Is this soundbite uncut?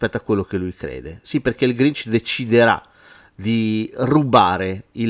yes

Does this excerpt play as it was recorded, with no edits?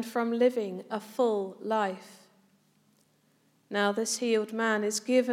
yes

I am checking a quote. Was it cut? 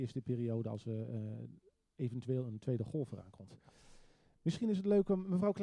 no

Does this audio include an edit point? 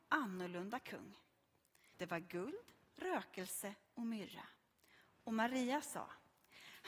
yes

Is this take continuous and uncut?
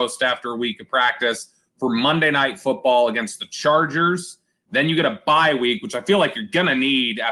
yes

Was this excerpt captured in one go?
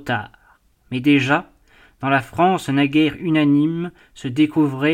yes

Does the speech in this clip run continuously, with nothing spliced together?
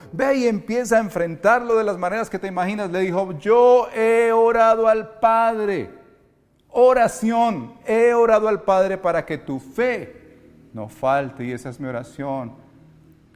yes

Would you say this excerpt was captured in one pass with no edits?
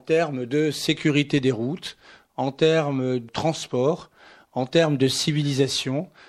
no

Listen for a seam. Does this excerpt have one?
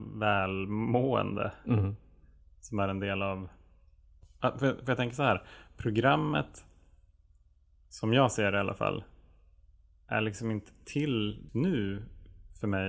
yes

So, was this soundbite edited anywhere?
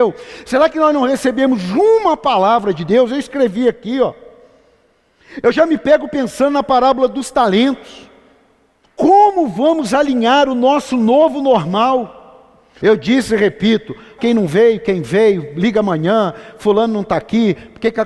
yes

